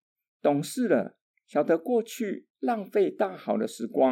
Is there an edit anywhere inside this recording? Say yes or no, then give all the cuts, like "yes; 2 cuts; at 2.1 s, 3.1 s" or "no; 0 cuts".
no; 0 cuts